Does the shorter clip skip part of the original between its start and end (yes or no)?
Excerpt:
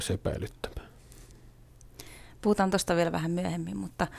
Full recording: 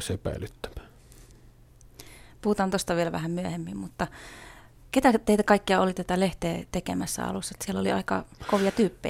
no